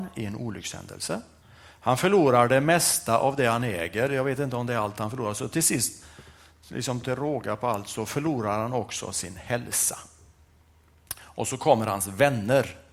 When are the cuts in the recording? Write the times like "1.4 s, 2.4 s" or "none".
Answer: none